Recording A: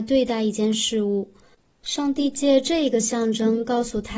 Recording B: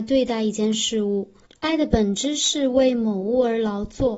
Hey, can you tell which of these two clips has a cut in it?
B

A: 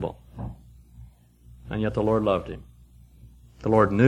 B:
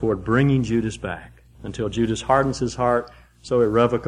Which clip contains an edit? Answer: B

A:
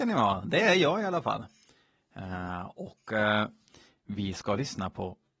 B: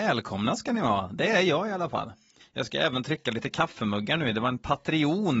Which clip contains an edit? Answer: B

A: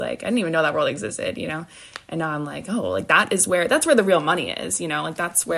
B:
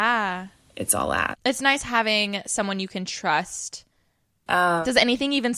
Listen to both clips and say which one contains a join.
B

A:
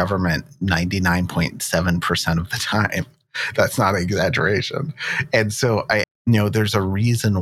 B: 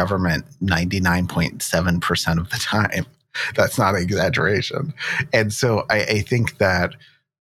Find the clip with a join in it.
A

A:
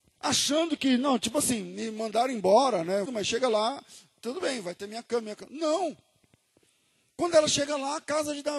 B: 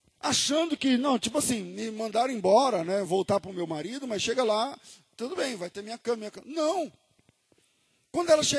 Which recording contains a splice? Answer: A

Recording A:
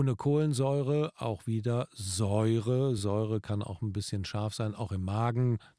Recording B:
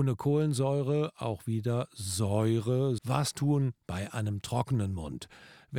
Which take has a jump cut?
B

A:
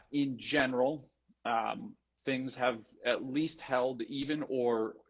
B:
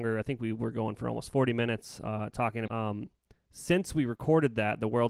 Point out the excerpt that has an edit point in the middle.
B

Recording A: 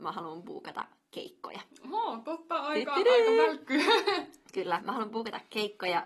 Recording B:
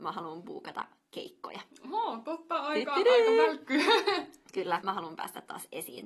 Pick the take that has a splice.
B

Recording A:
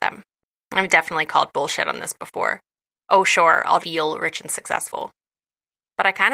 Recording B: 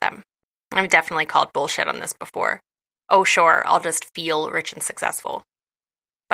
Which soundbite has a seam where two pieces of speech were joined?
A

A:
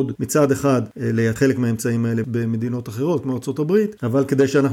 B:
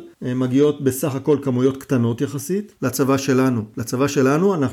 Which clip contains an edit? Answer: B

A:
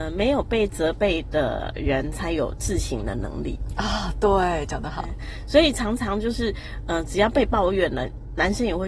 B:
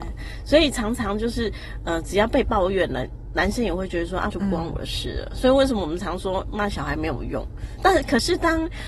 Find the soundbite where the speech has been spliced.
B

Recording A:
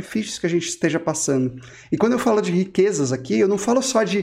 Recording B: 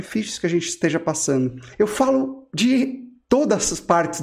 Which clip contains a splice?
B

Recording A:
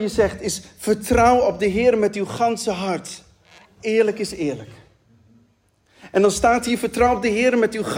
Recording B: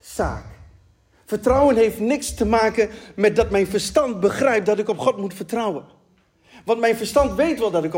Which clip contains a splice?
A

